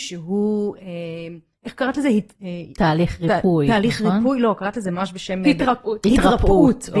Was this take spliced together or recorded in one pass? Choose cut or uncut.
uncut